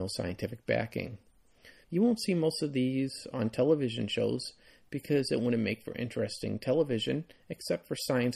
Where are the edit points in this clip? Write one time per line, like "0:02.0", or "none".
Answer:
0:01.8